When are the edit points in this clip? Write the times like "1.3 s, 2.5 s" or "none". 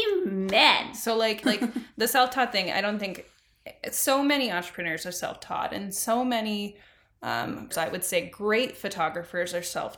1.4 s, 7.7 s

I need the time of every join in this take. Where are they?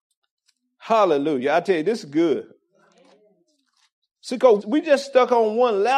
4.6 s

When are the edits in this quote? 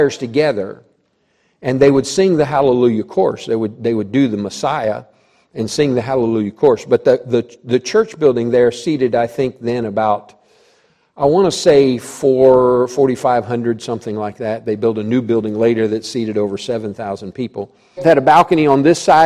18.0 s

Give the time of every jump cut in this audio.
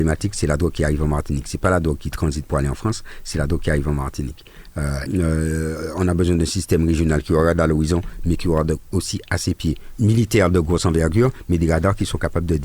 5.1 s, 9.9 s

